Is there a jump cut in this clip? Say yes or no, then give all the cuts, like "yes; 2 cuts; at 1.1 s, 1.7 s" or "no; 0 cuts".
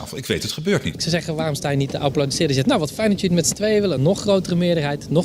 no; 0 cuts